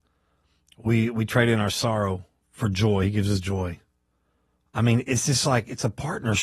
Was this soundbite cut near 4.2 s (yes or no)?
no